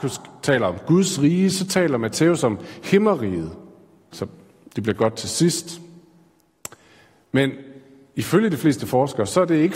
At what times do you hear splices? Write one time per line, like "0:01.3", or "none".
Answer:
0:04.1

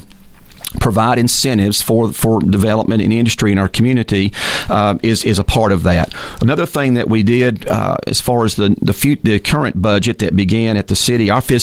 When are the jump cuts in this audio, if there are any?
none

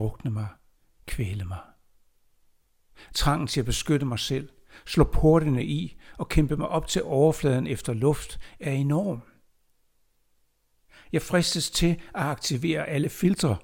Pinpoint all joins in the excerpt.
none

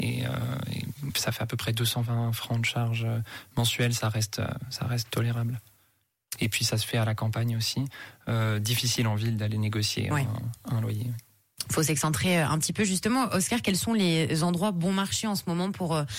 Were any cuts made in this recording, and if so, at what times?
0:06.4

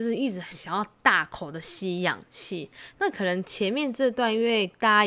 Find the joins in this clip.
0:02.9

